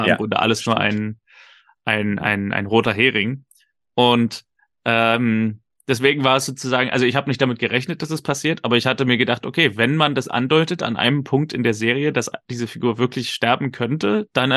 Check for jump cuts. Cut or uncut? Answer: uncut